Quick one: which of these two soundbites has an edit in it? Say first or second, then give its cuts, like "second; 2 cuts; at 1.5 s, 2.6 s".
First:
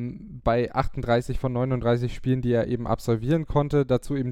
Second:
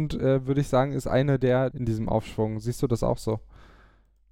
second; 1 cut; at 1.7 s